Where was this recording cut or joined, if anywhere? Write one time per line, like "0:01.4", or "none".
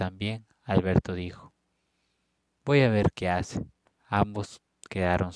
0:03.9